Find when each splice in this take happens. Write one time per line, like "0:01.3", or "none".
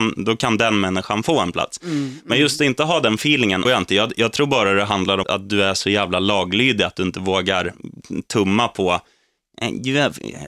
0:03.6
0:05.2